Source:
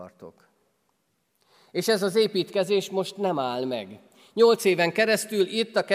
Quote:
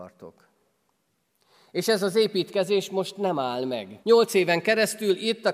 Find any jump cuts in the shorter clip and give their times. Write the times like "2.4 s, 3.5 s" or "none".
4.0 s